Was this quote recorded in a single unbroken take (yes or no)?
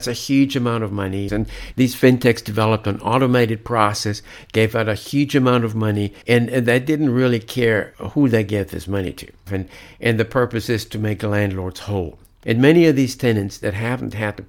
no